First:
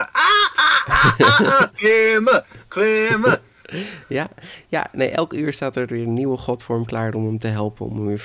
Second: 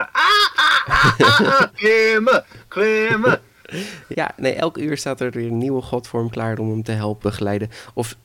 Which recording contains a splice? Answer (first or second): second